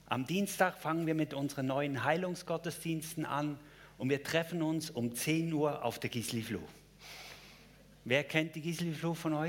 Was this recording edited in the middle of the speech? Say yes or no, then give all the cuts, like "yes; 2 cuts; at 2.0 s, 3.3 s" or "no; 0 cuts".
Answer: no; 0 cuts